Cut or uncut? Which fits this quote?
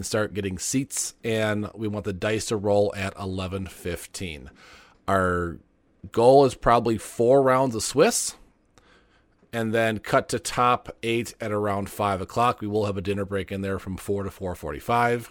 uncut